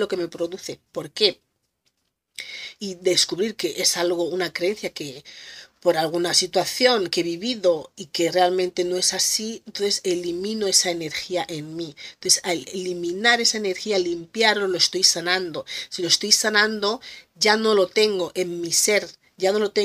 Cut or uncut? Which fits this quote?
uncut